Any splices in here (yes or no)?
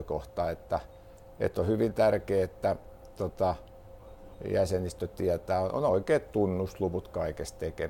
no